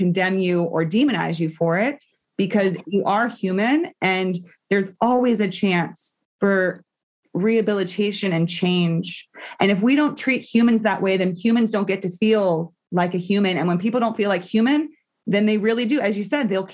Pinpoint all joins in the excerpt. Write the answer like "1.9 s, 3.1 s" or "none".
none